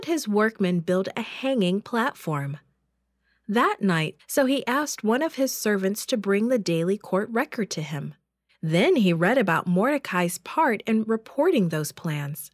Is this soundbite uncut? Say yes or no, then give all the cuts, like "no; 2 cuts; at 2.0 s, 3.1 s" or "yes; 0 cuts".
no; 2 cuts; at 4.2 s, 8.5 s